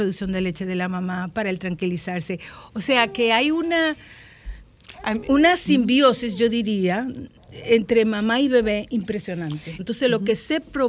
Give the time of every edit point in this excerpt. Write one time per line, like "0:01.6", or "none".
0:09.8